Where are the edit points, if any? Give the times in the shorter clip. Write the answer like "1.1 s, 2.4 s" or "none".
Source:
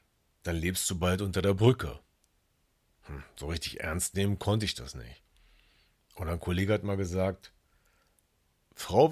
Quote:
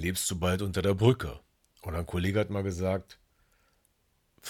1.7 s